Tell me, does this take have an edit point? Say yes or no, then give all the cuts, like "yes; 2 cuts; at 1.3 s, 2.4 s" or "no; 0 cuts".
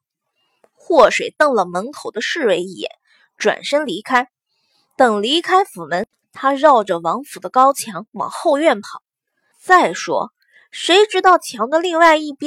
yes; 2 cuts; at 6.2 s, 9.5 s